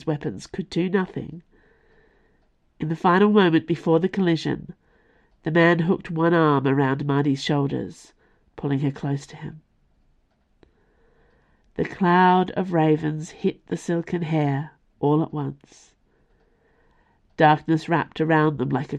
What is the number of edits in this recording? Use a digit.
0